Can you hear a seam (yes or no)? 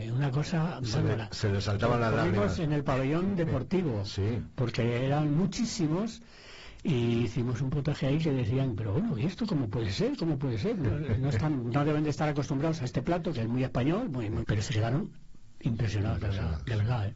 yes